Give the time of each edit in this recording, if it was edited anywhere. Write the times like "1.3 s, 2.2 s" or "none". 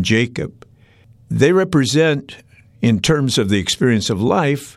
none